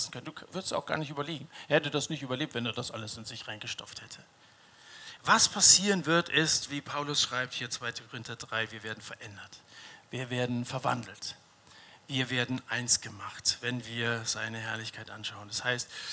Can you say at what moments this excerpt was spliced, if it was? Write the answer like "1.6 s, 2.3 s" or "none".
none